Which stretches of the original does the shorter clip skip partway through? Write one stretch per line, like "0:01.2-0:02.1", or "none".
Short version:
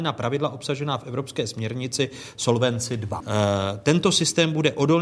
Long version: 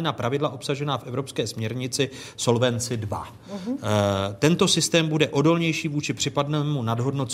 0:03.2-0:03.8